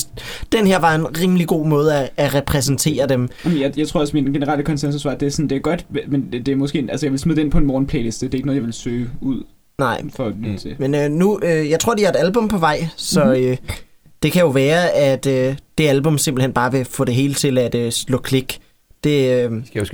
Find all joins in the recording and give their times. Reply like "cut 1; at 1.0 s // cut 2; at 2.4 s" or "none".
none